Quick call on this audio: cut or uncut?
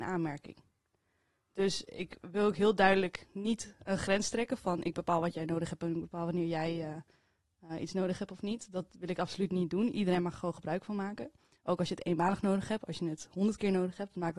uncut